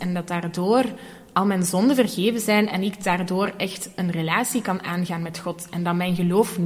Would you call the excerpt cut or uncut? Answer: uncut